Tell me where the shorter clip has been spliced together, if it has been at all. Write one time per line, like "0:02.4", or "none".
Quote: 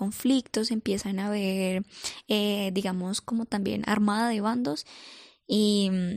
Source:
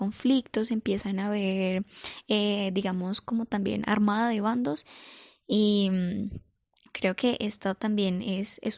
none